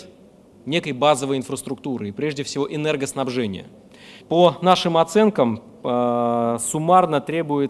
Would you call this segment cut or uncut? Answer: cut